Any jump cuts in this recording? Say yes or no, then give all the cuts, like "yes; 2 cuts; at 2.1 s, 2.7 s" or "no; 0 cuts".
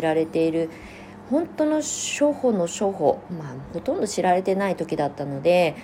no; 0 cuts